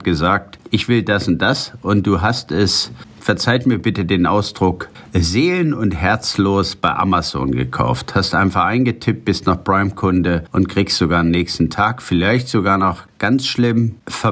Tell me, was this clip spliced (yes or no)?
no